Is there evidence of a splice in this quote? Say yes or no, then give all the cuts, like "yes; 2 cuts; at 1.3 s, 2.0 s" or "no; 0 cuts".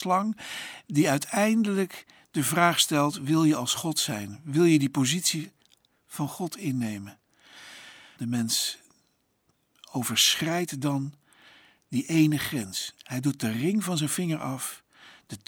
yes; 1 cut; at 8.2 s